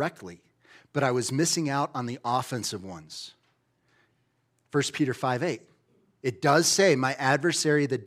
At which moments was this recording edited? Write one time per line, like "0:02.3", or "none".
none